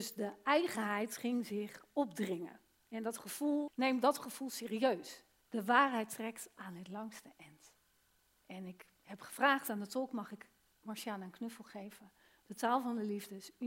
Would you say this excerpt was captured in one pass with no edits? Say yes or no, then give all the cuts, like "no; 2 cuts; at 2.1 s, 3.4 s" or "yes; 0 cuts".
no; 2 cuts; at 3.7 s, 5.4 s